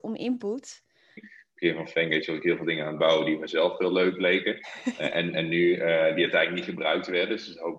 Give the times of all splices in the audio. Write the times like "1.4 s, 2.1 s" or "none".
1.2 s